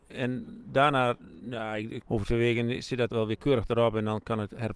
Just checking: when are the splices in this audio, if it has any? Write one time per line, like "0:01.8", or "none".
0:02.0
0:03.1

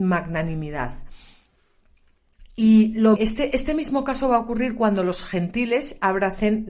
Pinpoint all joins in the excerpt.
0:03.2

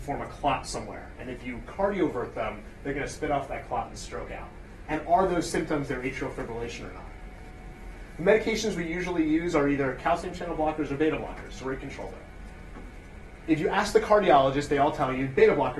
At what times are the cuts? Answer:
0:04.9
0:13.4

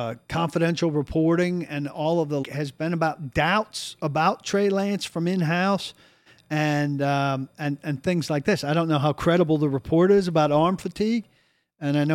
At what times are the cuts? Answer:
0:02.4

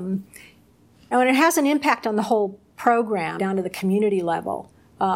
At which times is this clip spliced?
0:01.1
0:03.4

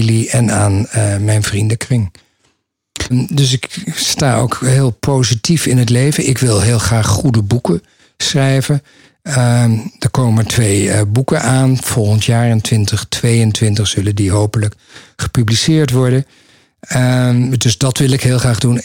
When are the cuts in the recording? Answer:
0:03.1

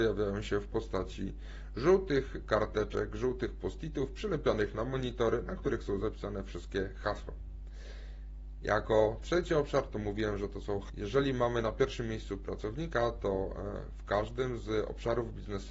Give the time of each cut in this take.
0:10.9

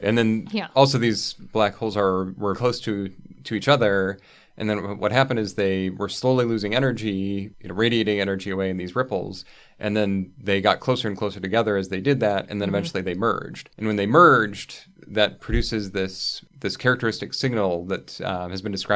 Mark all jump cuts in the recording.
0:02.5

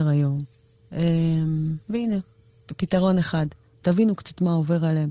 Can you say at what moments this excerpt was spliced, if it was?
0:01.8
0:03.7

